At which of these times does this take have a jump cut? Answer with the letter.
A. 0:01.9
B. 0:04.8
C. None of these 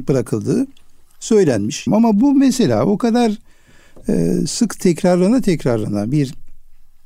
A